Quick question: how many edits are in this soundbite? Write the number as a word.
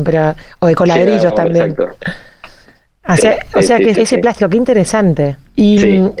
one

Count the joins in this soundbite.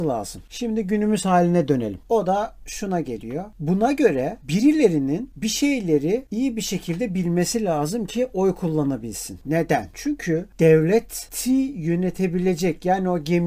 one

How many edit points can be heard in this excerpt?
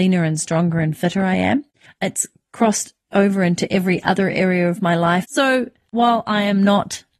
two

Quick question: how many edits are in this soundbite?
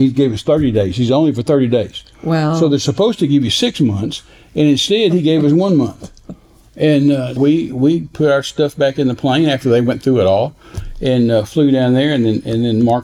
one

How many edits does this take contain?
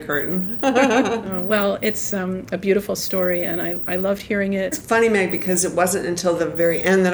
one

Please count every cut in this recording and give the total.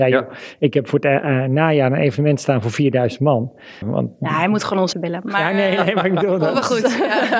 two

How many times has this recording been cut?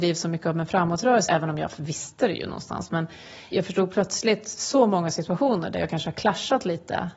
two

